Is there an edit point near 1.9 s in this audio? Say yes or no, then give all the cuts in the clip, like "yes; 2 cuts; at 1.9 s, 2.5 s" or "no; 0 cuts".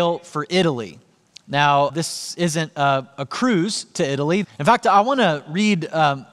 yes; 2 cuts; at 1.9 s, 4.4 s